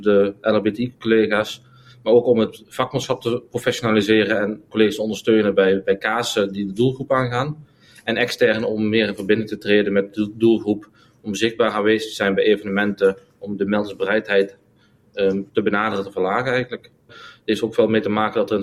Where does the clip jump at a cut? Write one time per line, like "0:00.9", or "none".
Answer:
0:15.5
0:17.1